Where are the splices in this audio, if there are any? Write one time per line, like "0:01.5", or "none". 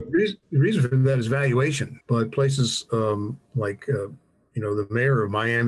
0:02.0